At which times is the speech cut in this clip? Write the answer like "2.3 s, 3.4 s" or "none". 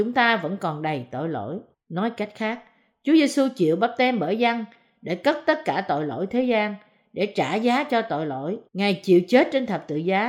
1.7 s, 8.7 s